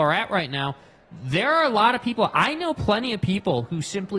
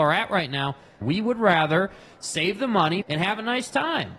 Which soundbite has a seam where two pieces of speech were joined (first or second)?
second